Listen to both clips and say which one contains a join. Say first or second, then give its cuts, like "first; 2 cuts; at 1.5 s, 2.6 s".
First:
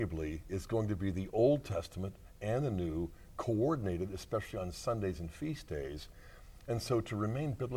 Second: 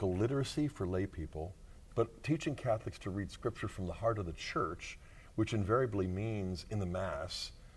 second; 1 cut; at 1.9 s